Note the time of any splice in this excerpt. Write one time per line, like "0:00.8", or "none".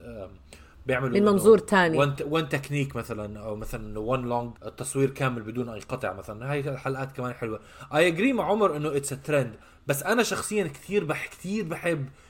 0:02.2
0:04.6